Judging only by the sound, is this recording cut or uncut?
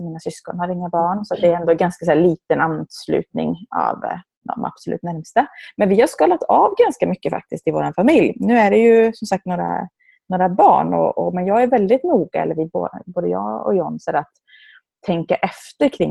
uncut